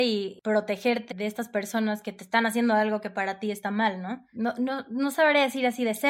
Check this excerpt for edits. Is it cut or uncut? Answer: cut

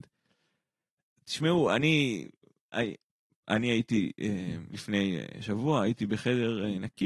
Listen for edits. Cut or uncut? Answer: uncut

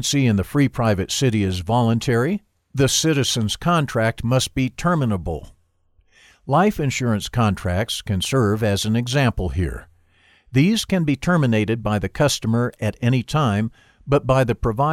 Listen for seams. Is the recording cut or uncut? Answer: uncut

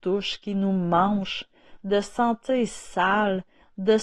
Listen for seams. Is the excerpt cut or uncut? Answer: uncut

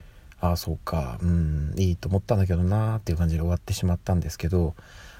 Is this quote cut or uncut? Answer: uncut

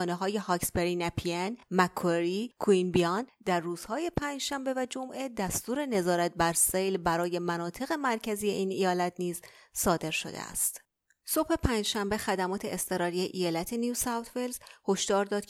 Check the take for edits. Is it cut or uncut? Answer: uncut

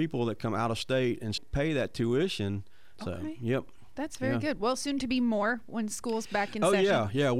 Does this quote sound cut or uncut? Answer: cut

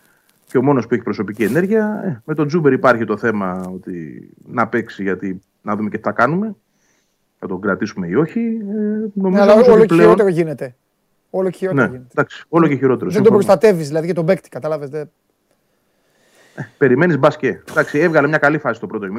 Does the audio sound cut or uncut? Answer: uncut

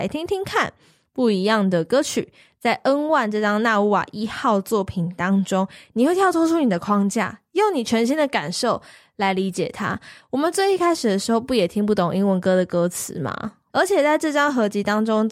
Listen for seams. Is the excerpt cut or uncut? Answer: cut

